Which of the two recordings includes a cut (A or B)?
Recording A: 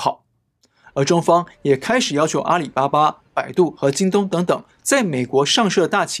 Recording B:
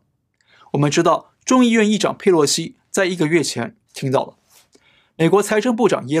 B